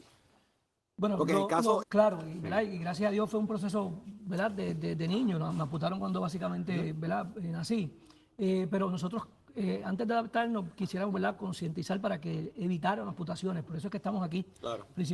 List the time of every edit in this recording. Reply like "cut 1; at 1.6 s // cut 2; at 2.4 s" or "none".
cut 1; at 1.8 s